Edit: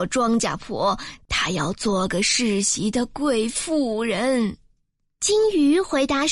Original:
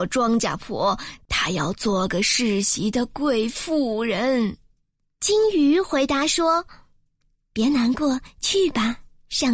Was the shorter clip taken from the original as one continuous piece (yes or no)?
yes